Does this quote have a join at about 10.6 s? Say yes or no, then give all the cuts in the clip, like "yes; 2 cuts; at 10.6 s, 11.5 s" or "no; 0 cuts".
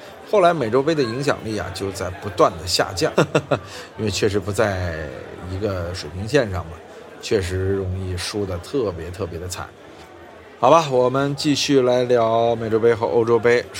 no; 1 cut; at 3.1 s